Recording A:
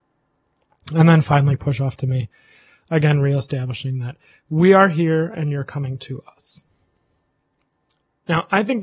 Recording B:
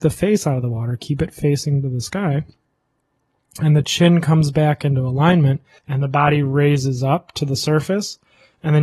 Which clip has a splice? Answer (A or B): B